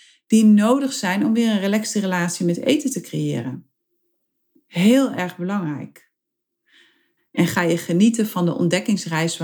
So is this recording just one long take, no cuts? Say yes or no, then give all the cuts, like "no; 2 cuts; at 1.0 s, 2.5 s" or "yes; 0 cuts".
no; 1 cut; at 7.2 s